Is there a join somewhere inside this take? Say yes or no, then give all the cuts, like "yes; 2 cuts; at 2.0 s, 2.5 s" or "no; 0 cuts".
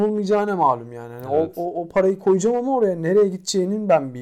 no; 0 cuts